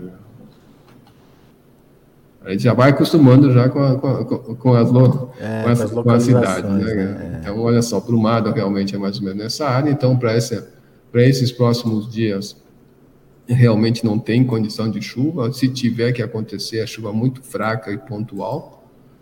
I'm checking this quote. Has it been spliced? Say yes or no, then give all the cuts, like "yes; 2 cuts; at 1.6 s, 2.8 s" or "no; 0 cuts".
no; 0 cuts